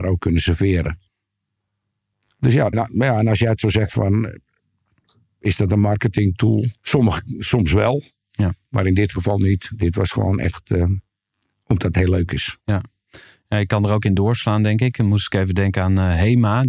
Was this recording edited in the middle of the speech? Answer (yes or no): yes